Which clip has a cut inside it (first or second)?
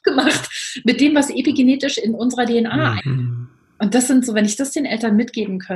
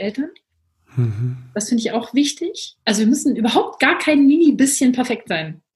first